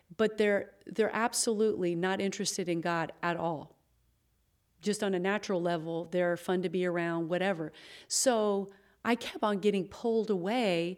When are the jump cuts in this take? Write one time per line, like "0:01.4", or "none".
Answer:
none